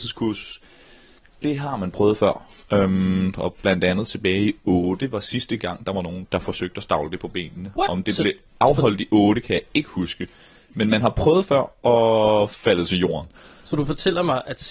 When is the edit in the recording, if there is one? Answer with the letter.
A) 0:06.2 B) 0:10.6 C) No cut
A